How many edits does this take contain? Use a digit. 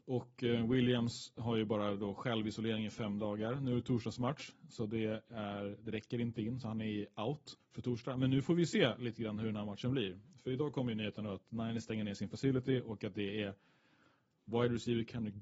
1